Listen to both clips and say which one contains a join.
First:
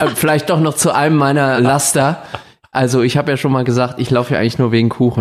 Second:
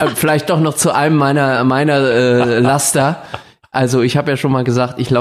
first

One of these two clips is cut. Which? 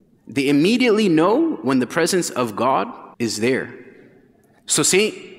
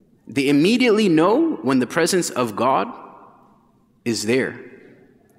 first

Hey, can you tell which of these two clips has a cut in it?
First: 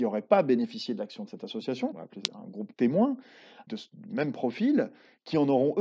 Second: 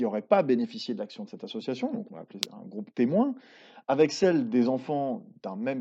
first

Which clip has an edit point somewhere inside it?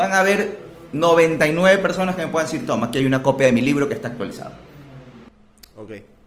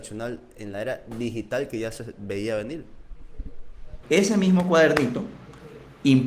second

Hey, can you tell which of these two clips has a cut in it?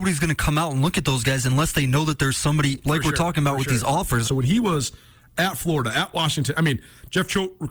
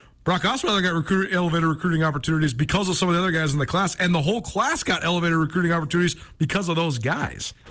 first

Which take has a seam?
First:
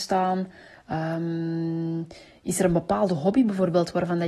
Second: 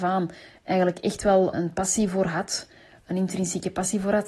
second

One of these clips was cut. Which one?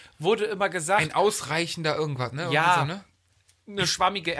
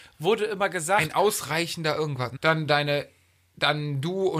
second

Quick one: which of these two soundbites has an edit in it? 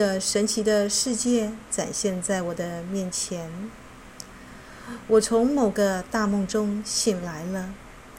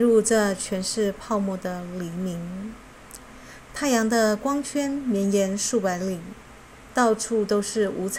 second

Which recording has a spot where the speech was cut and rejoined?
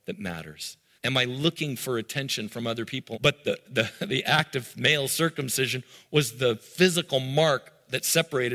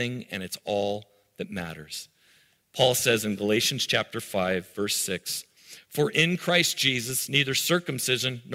first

